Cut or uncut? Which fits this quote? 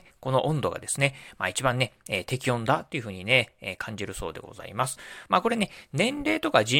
cut